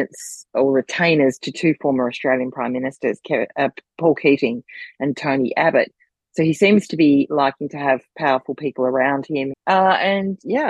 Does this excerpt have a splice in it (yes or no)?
yes